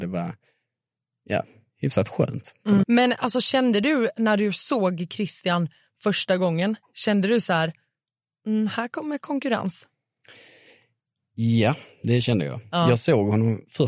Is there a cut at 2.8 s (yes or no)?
yes